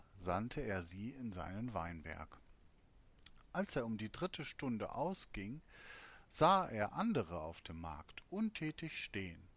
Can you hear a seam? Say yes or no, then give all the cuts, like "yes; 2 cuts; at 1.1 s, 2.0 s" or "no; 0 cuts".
no; 0 cuts